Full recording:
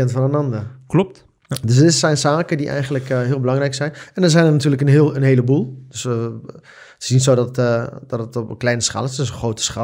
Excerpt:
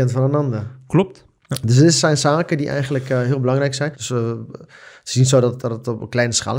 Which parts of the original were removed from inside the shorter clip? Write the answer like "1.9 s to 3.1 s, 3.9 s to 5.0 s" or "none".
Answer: 3.9 s to 5.9 s, 7.5 s to 8.1 s